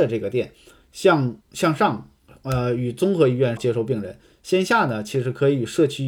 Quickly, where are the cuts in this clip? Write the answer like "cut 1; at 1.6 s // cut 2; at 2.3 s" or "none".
cut 1; at 1.4 s // cut 2; at 3.6 s